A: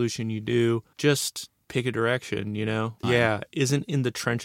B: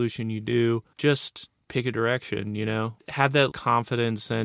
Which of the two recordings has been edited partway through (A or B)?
A